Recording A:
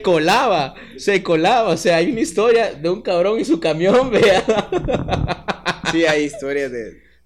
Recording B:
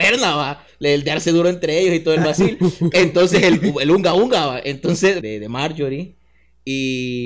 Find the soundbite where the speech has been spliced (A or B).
B